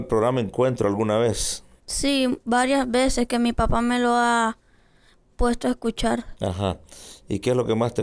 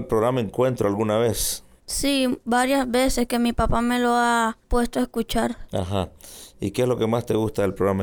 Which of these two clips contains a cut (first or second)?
second